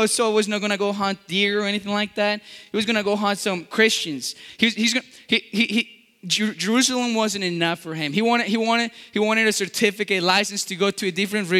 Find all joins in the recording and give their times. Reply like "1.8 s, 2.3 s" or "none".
none